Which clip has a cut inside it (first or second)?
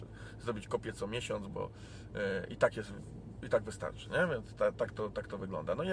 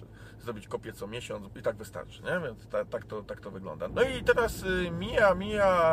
second